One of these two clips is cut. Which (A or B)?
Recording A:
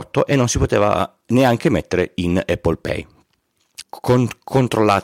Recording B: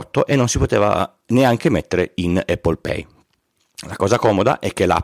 A